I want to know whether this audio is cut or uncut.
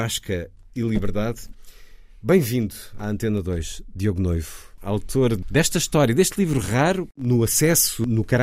cut